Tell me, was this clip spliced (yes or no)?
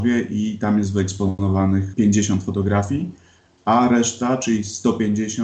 no